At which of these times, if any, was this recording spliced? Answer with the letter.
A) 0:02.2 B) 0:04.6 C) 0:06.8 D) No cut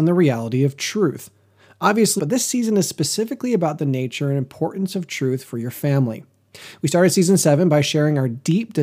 A